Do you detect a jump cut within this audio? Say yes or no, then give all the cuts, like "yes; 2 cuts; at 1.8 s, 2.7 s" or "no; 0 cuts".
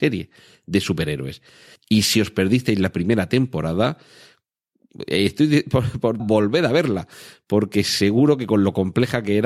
yes; 2 cuts; at 1.8 s, 6.2 s